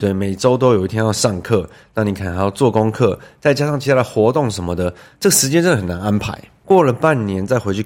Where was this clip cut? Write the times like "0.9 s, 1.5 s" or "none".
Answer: none